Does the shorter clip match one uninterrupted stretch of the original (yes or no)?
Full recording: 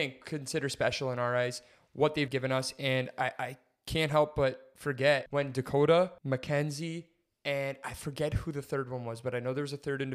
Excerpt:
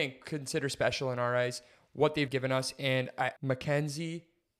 no